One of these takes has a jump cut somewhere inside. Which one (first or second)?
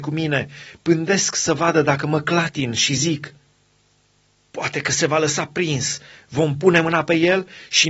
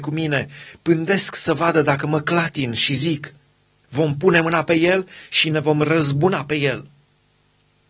second